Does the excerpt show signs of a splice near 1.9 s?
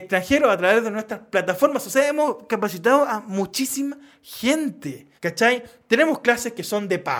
no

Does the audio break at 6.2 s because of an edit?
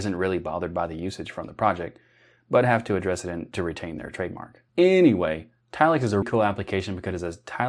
yes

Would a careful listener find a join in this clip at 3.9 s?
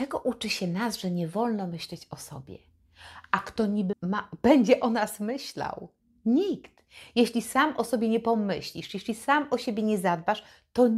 yes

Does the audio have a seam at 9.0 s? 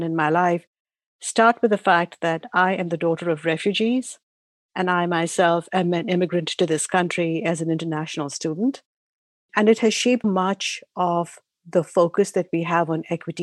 no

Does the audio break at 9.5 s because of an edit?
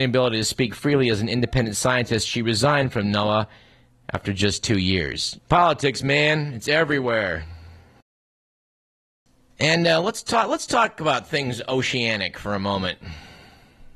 no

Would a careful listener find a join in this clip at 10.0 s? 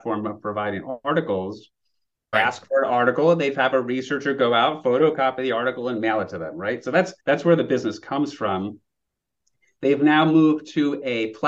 no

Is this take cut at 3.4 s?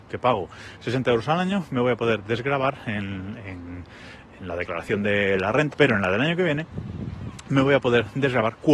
no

